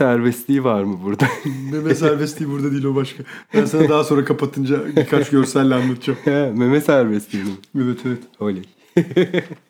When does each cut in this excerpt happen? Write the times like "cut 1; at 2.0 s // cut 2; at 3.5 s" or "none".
none